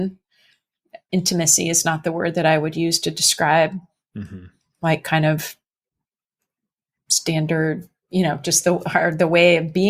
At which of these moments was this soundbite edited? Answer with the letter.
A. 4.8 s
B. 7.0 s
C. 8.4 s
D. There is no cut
D